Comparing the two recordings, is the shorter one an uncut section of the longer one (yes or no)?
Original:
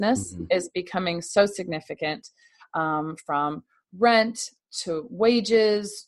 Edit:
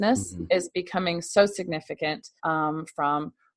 no